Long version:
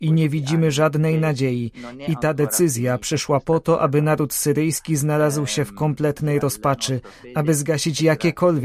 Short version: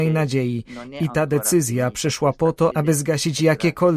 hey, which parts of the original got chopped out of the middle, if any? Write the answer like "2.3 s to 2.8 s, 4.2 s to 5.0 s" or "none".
3.8 s to 7.3 s